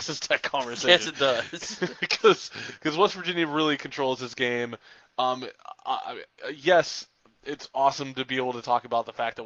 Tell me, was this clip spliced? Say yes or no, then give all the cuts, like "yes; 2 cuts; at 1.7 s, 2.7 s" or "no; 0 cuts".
no; 0 cuts